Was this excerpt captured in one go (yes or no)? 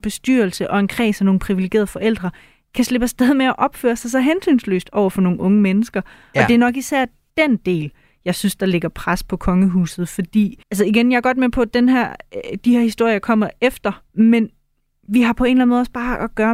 no